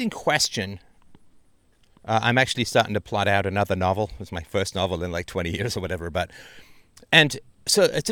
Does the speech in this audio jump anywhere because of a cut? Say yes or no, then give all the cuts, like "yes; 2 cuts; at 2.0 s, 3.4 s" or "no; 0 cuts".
no; 0 cuts